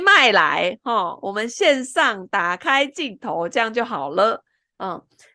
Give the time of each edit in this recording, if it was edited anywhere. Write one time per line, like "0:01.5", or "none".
none